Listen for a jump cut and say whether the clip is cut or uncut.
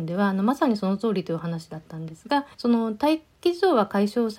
cut